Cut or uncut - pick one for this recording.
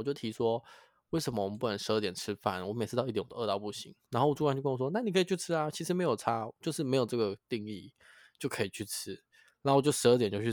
uncut